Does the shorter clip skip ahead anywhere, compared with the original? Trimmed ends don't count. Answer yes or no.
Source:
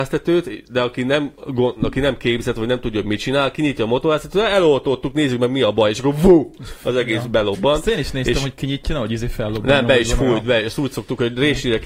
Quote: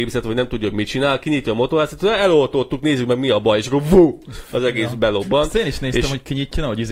no